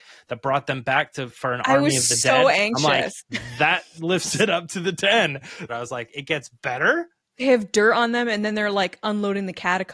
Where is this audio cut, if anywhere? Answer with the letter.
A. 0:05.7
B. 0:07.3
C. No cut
A